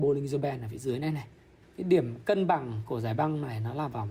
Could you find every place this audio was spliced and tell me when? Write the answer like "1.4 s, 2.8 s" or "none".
1.6 s